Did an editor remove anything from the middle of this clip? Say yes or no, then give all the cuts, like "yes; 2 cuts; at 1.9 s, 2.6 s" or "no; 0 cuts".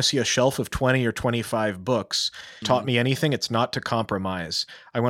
yes; 1 cut; at 2.6 s